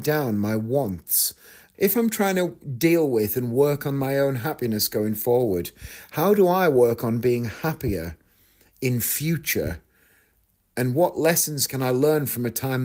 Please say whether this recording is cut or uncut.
cut